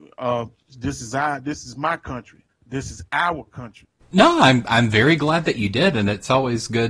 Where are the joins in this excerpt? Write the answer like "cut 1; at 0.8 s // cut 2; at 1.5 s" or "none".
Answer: cut 1; at 2.5 s // cut 2; at 4.0 s